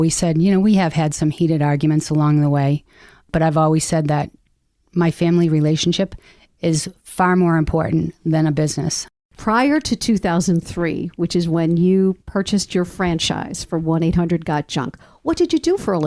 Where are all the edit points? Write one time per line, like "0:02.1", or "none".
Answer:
0:09.2
0:12.2